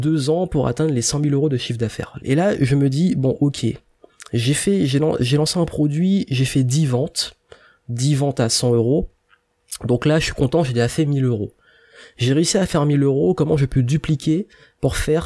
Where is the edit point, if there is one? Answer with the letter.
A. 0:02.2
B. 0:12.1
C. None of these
A